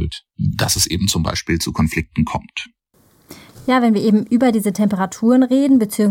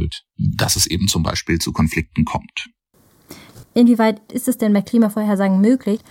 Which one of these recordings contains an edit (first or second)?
second